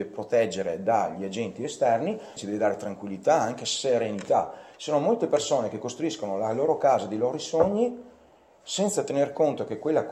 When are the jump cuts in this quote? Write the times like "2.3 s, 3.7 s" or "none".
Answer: 2.4 s